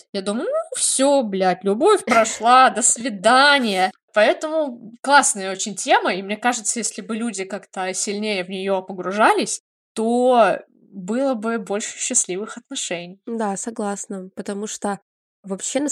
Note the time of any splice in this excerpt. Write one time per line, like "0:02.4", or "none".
none